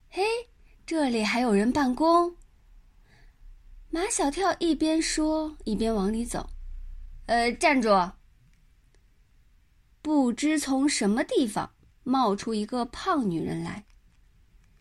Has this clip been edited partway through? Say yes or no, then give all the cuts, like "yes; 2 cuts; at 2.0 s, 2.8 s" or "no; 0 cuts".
no; 0 cuts